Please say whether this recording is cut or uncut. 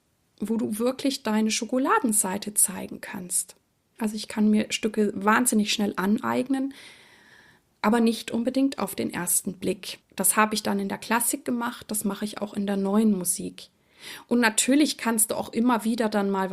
cut